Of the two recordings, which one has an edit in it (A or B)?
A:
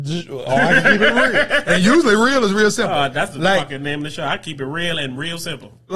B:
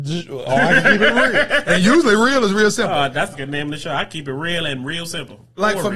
B